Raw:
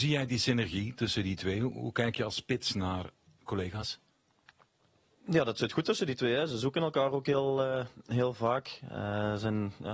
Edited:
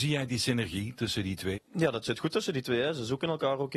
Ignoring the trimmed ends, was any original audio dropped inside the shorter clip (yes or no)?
yes